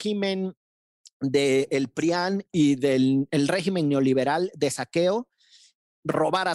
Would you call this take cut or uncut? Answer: uncut